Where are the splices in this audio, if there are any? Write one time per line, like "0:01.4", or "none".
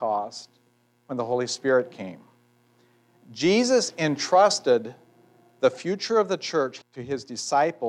0:06.8